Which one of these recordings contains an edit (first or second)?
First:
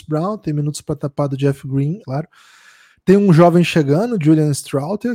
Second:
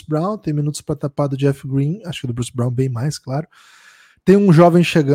first